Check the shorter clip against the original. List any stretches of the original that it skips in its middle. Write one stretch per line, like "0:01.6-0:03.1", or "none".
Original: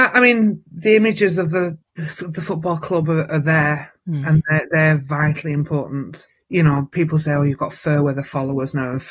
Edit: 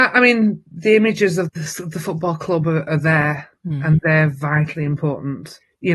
0:01.5-0:01.9
0:04.4-0:04.7